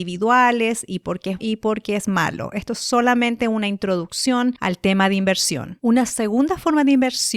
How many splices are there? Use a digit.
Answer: 1